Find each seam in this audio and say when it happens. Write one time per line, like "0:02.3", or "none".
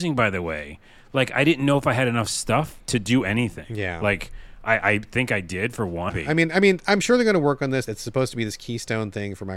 0:06.1
0:07.9

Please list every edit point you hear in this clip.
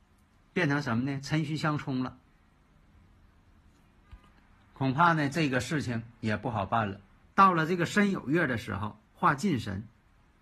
0:07.3
0:09.1

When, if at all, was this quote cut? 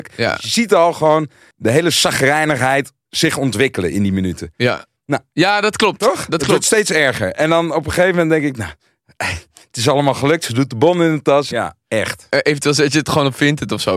0:11.5

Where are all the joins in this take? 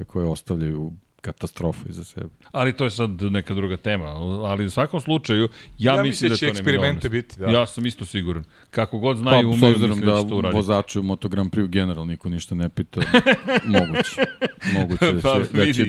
0:02.4

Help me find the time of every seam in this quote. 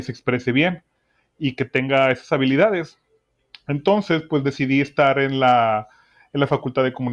none

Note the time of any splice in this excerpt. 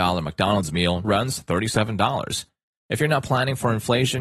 0:01.0

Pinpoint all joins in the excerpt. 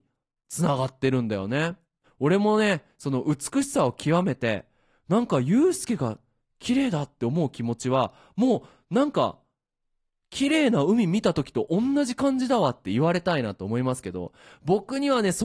0:02.0

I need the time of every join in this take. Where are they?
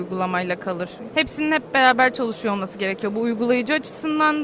0:01.1

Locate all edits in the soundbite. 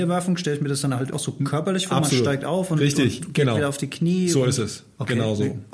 0:01.1

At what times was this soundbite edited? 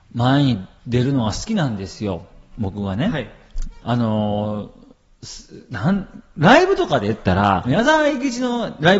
0:03.8
0:07.6

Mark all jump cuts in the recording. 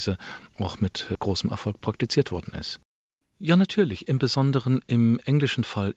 0:03.2

